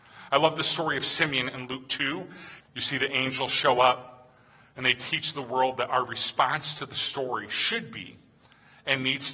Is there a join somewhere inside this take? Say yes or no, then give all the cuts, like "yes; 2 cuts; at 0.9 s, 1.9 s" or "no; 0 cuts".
yes; 1 cut; at 2.6 s